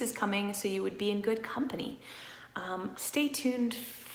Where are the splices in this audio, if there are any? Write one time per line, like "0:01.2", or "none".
0:02.9